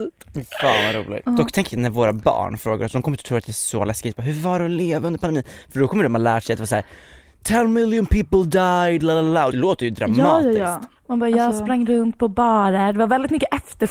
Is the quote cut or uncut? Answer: cut